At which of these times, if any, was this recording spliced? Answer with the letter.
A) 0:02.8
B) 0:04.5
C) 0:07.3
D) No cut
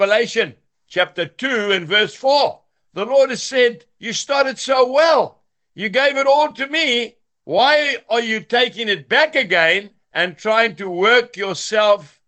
D